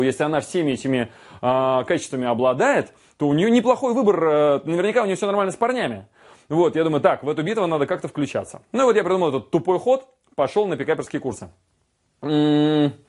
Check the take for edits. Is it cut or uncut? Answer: uncut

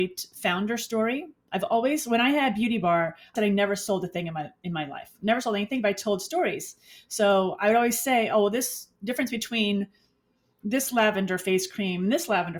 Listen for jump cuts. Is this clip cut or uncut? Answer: cut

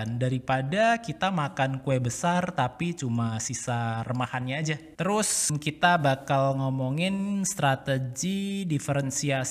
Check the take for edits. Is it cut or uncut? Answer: cut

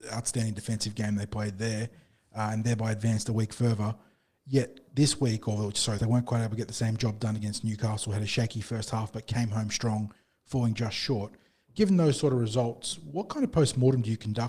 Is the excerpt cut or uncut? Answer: cut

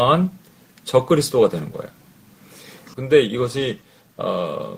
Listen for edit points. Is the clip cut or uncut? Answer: cut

